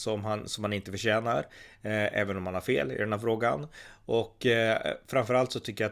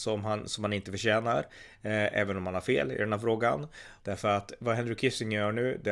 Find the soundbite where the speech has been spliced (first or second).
second